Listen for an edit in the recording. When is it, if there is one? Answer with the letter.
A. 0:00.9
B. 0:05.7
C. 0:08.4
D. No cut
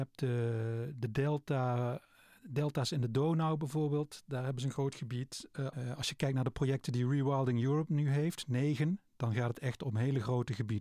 B